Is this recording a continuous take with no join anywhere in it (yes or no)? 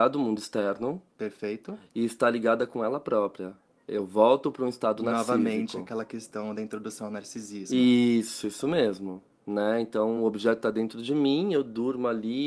yes